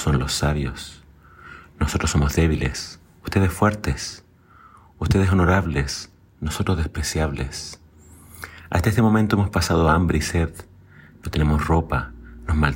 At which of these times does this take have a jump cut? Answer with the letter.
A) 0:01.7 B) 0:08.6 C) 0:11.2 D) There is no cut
D